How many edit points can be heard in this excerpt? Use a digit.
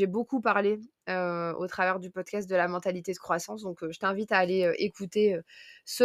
0